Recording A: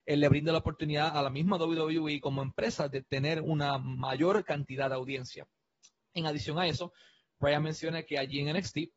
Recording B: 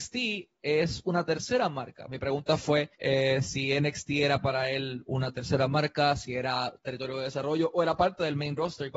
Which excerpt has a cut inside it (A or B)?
B